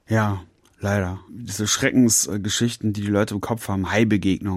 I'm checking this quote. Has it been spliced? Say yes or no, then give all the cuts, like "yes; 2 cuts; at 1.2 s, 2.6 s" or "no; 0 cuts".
no; 0 cuts